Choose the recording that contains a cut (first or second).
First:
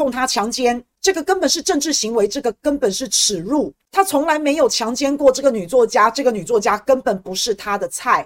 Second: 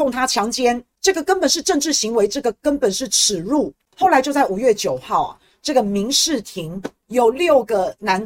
second